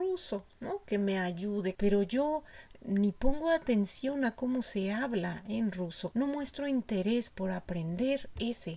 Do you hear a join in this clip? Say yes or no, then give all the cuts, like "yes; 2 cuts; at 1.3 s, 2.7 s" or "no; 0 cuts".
yes; 2 cuts; at 1.8 s, 6.1 s